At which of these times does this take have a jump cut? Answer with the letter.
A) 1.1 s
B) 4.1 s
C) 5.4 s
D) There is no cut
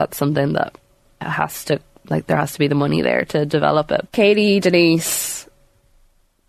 B